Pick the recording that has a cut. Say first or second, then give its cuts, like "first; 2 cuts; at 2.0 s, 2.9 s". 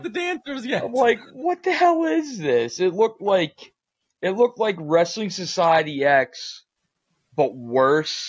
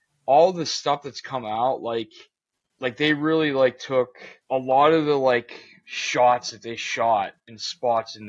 second; 2 cuts; at 2.7 s, 4.4 s